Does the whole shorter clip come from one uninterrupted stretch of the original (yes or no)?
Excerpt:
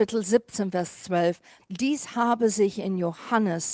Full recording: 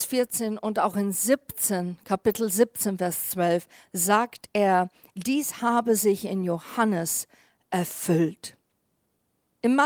no